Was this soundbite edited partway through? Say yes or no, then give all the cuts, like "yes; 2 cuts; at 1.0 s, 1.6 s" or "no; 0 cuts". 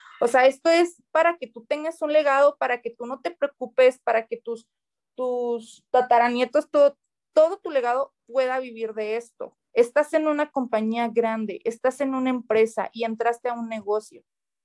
no; 0 cuts